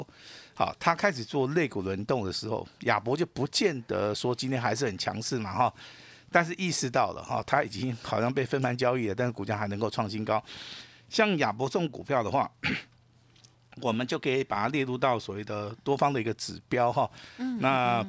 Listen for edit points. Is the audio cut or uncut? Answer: uncut